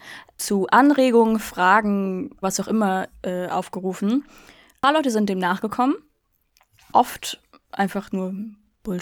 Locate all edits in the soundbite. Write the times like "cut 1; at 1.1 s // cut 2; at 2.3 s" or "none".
cut 1; at 2.4 s